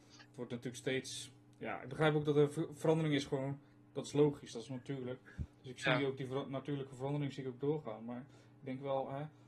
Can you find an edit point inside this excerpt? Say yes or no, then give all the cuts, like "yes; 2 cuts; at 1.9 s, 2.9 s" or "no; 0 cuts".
no; 0 cuts